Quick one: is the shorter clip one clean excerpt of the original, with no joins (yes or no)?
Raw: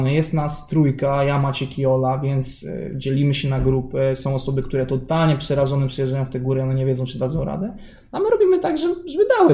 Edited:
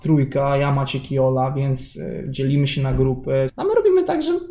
no